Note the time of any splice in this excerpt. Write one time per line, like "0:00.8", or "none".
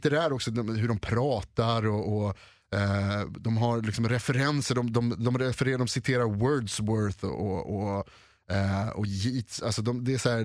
none